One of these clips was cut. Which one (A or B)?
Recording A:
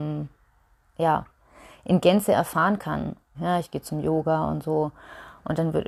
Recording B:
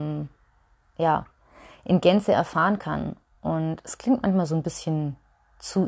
A